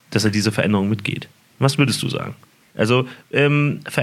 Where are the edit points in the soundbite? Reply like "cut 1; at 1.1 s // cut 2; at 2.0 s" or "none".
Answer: cut 1; at 2.7 s